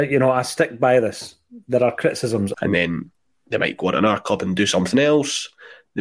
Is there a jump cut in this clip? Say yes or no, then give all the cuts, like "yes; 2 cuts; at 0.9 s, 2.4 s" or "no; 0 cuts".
yes; 1 cut; at 2.5 s